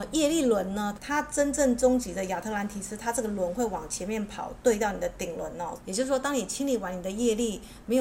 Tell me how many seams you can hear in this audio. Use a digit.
2